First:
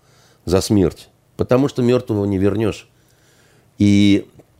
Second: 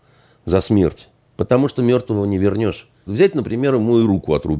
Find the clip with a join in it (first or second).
second